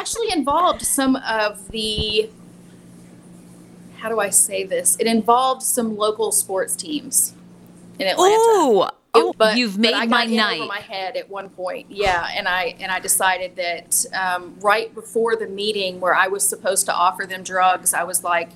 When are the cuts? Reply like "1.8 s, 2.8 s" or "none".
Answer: 9.3 s